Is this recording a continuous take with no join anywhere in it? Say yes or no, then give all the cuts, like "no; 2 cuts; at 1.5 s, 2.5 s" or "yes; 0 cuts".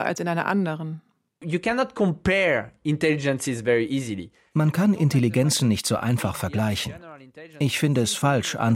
yes; 0 cuts